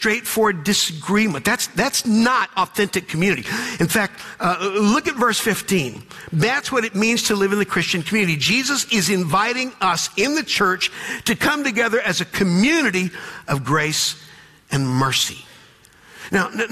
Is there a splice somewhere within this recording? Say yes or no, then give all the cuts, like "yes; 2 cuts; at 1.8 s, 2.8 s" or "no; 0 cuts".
yes; 1 cut; at 6.3 s